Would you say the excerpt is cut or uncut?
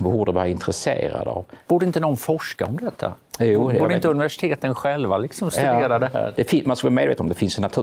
uncut